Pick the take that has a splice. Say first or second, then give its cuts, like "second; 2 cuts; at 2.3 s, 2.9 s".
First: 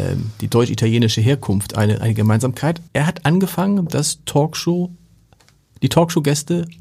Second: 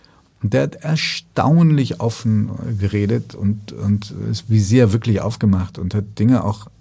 first; 1 cut; at 2.9 s